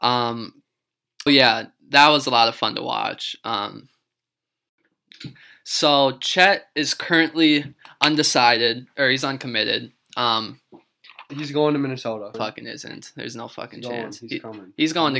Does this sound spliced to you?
yes; 3 cuts; at 1.3 s, 11.3 s, 12.3 s

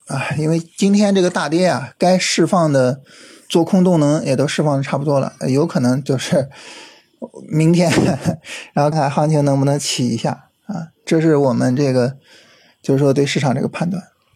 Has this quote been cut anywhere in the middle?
yes; 1 cut; at 8.9 s

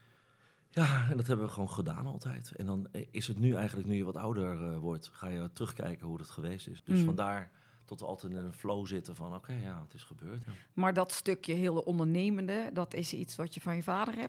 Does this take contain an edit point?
yes; 2 cuts; at 6.8 s, 10.4 s

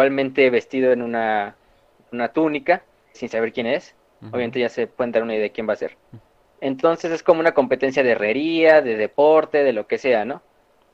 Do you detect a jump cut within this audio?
yes; 2 cuts; at 3.1 s, 6.0 s

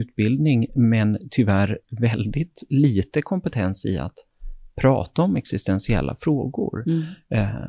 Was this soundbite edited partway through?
no; 0 cuts

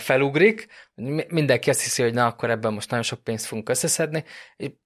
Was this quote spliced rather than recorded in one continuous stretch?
no; 0 cuts

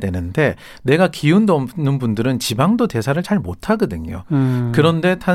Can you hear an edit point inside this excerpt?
no; 0 cuts

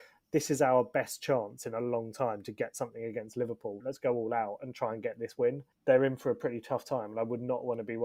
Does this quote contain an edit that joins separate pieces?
yes; 1 cut; at 3.8 s

